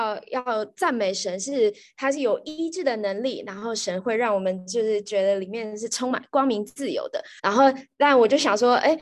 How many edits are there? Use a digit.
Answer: 1